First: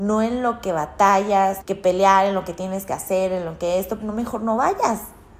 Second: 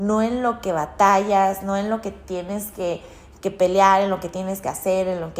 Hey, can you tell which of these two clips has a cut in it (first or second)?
first